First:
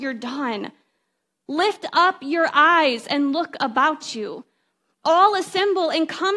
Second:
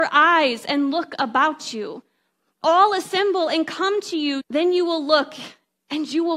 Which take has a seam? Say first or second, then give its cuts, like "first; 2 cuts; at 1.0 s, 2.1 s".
second; 1 cut; at 4.4 s